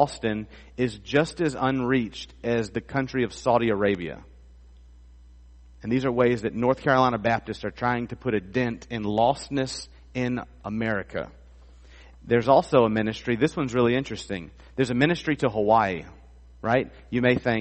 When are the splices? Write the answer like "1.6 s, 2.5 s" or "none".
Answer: none